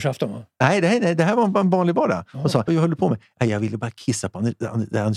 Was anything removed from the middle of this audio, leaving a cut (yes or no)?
yes